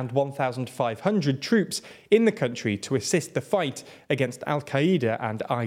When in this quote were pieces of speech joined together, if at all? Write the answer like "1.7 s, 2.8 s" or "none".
none